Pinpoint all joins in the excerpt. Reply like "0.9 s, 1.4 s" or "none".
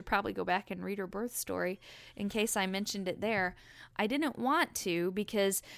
3.9 s

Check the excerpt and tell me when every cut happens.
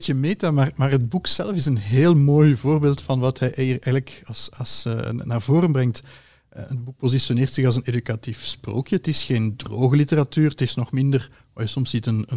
none

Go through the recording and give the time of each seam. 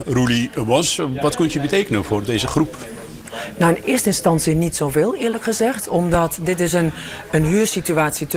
none

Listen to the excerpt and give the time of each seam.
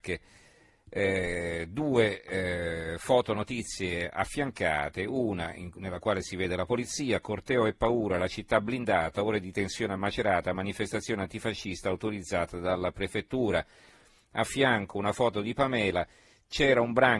none

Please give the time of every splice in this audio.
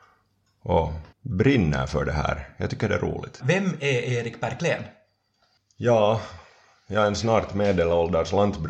1.1 s, 3.4 s

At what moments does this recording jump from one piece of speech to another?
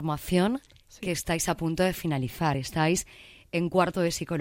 none

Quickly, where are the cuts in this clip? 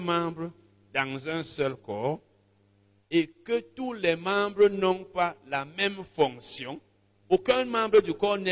7.2 s

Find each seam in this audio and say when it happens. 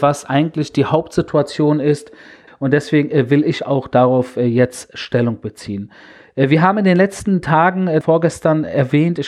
2.5 s, 8.0 s

